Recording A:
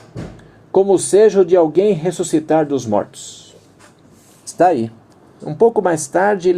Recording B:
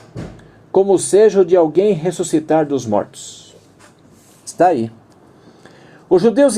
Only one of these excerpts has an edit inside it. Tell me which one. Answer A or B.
A